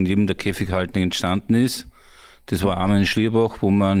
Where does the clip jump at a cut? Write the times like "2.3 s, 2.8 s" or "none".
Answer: none